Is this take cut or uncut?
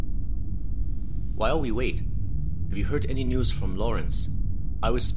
uncut